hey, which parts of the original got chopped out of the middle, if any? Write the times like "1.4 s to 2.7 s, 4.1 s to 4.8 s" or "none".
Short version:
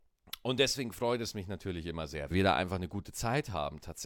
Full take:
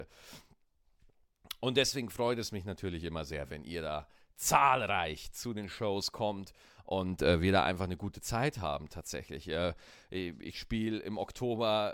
3.5 s to 7.4 s